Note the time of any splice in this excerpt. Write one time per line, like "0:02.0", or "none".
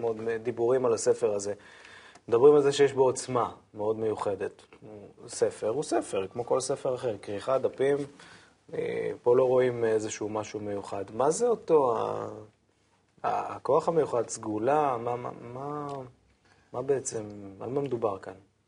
none